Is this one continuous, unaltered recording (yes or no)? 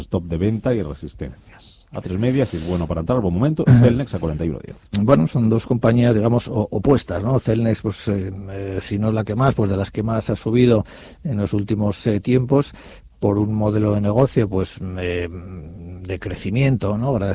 yes